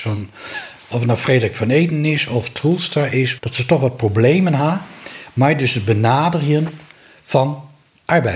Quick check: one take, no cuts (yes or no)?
no